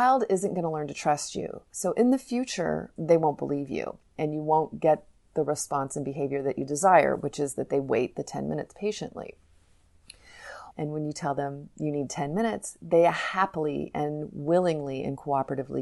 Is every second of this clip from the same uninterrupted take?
no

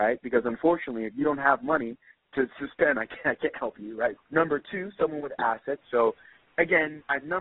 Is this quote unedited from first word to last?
no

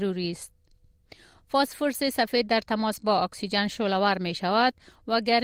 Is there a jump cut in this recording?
yes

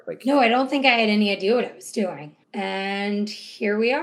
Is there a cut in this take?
yes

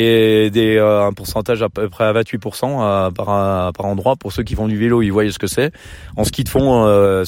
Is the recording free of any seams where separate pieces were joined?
yes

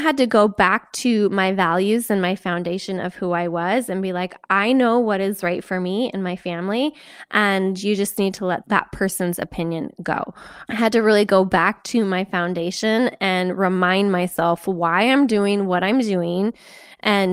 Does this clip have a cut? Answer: no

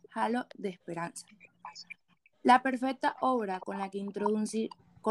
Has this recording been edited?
no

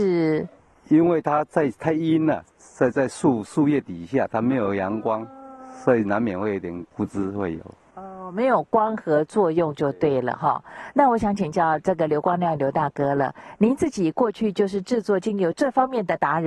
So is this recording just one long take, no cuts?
yes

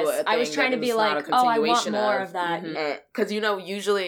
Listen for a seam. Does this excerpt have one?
yes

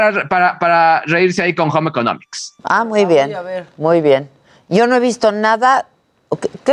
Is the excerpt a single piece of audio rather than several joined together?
yes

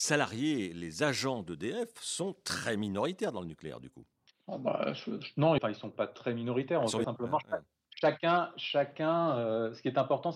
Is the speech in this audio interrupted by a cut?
yes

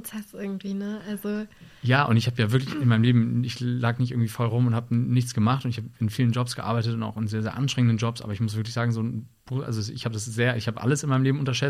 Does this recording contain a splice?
no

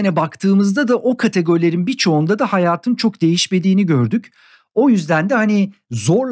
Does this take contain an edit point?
no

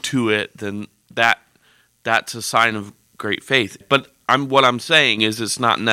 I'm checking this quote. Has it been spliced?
yes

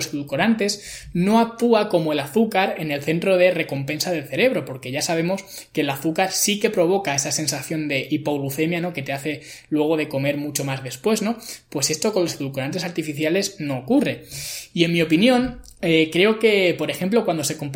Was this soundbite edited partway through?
no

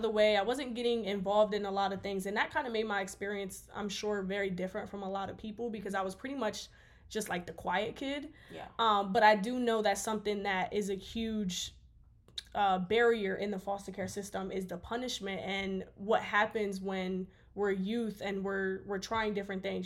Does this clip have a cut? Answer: no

